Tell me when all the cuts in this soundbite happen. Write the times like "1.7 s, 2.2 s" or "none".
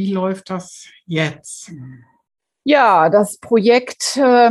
none

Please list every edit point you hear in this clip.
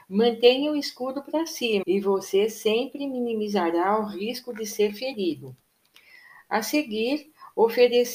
1.8 s

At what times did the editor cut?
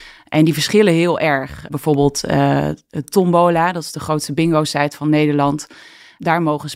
none

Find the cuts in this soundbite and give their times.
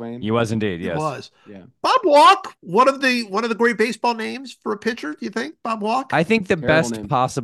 2.6 s

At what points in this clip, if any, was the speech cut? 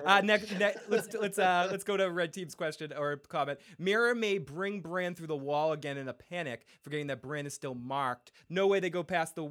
8.5 s

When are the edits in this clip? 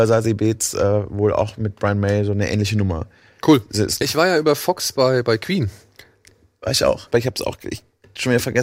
4.0 s, 7.1 s

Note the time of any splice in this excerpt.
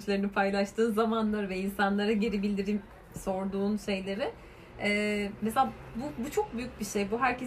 none

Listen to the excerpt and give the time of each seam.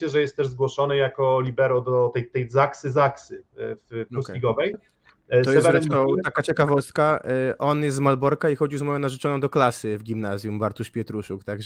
4.7 s

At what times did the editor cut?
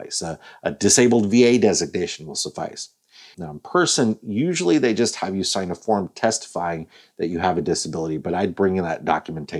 3.3 s

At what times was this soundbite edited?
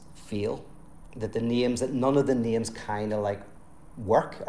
none

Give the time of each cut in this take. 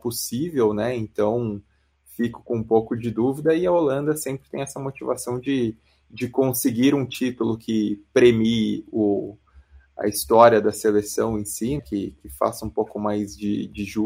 11.8 s

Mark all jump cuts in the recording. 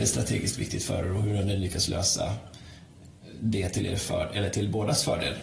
none

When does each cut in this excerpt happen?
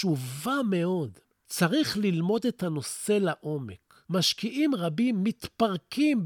none

